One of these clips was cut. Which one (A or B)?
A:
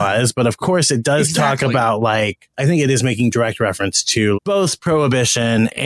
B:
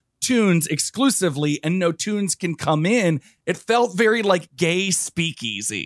A